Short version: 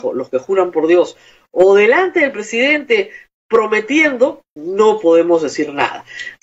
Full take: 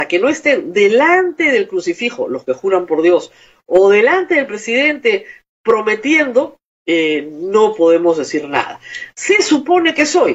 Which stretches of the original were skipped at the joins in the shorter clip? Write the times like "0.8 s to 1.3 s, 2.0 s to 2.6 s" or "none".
6.7 s to 7.3 s